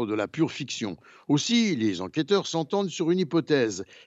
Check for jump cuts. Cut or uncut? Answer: uncut